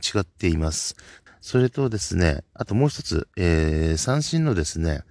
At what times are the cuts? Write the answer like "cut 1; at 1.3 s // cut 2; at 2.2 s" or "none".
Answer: cut 1; at 1.3 s